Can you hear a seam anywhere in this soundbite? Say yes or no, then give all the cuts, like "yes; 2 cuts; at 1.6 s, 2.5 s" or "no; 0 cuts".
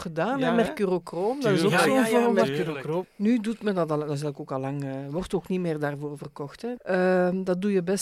yes; 2 cuts; at 3.0 s, 6.8 s